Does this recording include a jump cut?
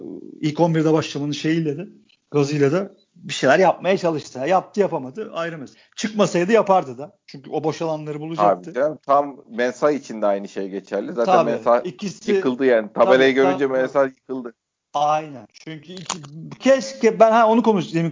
no; 0 cuts

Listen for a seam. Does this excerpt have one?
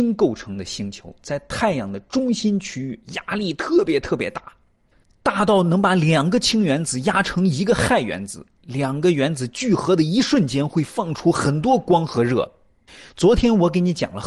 no; 0 cuts

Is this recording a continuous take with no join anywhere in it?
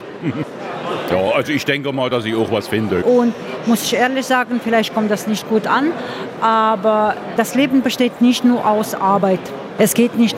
no; 1 cut; at 3.0 s

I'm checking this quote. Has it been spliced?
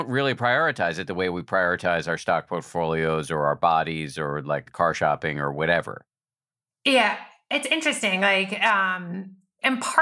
no; 0 cuts

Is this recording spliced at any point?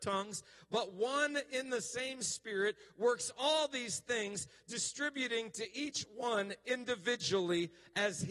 no; 0 cuts

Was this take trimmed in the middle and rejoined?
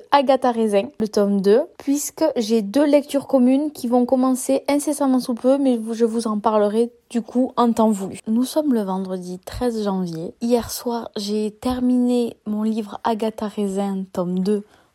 no; 0 cuts

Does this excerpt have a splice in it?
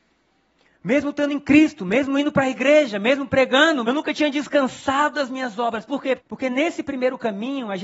yes; 2 cuts; at 3.8 s, 6.2 s

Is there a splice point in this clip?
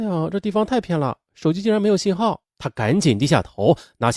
yes; 1 cut; at 2.5 s

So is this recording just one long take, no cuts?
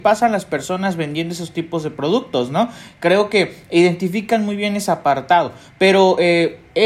yes; 0 cuts

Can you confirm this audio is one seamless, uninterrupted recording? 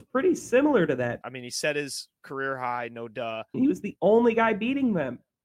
no; 2 cuts; at 1.2 s, 3.5 s

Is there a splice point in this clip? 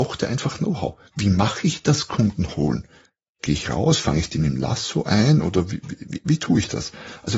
no; 0 cuts

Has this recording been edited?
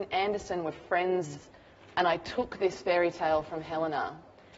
yes; 1 cut; at 1.4 s

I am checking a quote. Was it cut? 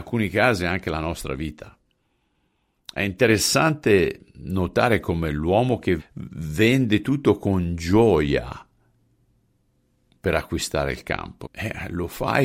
yes; 2 cuts; at 6.0 s, 11.4 s

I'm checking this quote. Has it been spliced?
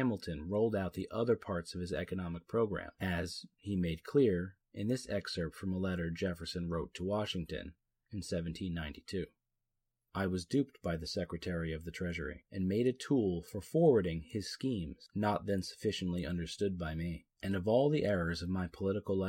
no; 0 cuts

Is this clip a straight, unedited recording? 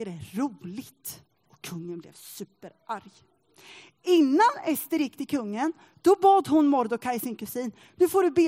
no; 1 cut; at 1.5 s

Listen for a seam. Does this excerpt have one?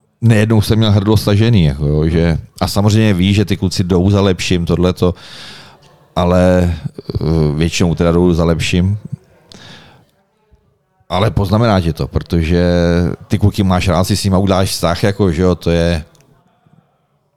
no; 0 cuts

